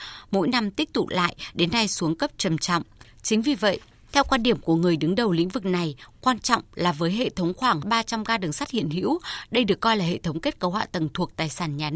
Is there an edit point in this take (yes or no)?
no